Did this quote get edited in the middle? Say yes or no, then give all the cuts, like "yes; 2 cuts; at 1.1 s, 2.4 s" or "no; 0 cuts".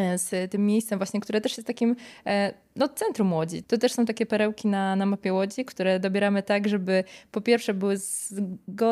yes; 1 cut; at 3.6 s